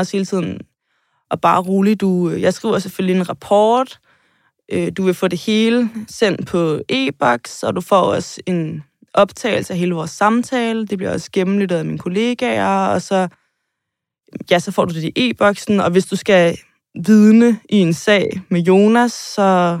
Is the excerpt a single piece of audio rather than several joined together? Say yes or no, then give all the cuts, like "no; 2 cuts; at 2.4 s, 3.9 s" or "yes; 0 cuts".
yes; 0 cuts